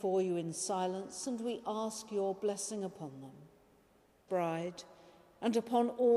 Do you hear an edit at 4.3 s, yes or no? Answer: yes